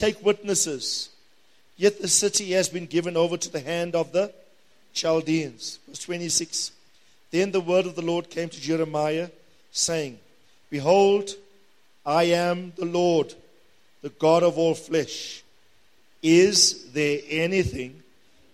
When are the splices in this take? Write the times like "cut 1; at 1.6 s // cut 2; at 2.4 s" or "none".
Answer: none